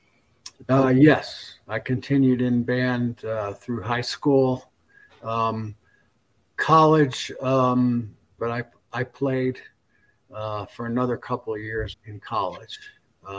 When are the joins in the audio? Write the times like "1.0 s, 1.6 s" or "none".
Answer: 8.4 s, 11.9 s